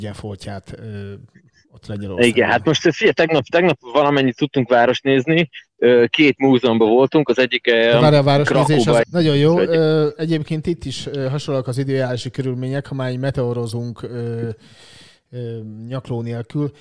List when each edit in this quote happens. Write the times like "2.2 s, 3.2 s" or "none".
9.0 s